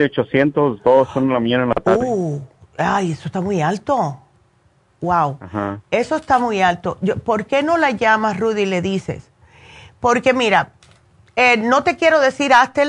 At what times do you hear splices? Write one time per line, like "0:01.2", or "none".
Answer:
none